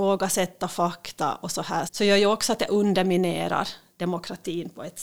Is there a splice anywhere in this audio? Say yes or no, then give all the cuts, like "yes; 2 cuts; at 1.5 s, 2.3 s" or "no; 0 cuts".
yes; 1 cut; at 1.9 s